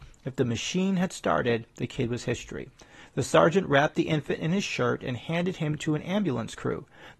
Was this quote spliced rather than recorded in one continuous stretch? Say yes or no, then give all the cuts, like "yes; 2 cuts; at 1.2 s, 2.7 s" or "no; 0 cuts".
no; 0 cuts